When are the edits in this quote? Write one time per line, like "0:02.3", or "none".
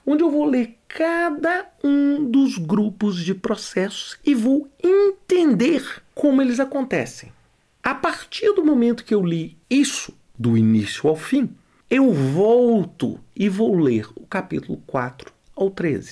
none